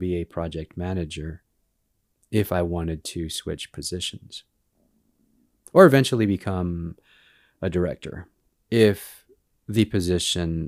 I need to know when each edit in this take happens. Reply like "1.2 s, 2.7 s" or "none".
none

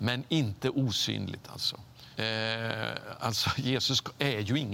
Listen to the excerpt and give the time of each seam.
2.2 s

